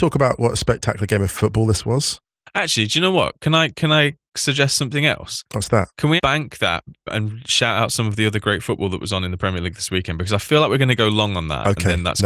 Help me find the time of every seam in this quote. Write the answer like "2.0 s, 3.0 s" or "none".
6.2 s